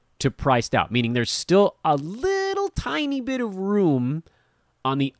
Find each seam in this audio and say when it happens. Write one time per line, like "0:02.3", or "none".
none